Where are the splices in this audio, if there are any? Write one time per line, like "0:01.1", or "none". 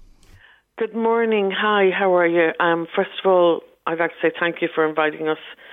none